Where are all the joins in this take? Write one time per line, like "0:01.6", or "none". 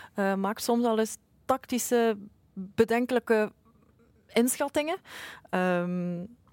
none